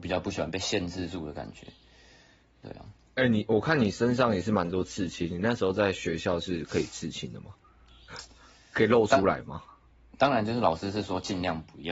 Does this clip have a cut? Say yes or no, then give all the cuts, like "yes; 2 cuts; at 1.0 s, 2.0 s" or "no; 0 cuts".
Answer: no; 0 cuts